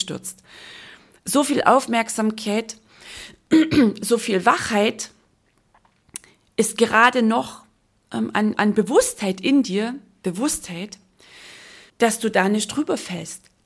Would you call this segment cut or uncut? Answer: cut